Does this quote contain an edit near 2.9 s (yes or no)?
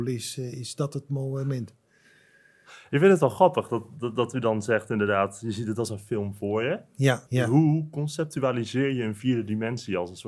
no